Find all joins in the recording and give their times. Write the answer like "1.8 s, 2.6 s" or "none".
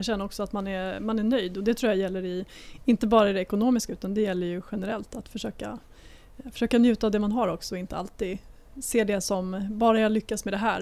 none